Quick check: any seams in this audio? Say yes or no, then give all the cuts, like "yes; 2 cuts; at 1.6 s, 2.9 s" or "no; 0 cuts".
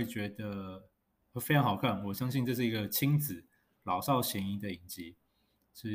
no; 0 cuts